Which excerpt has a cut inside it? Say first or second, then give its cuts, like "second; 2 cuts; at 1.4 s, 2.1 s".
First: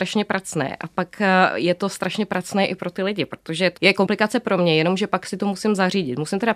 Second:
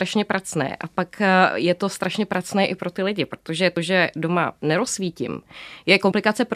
first; 1 cut; at 3.8 s